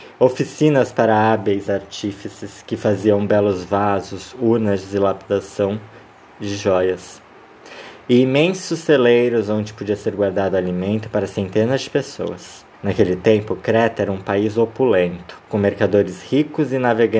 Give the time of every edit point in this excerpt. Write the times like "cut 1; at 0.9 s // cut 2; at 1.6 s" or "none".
cut 1; at 12.7 s // cut 2; at 15.4 s